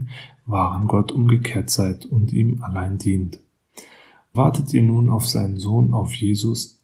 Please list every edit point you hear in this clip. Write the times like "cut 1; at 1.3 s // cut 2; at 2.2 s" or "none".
cut 1; at 4.3 s